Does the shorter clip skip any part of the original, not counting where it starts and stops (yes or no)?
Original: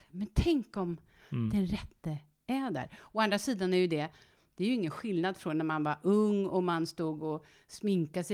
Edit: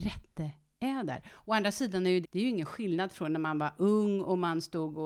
yes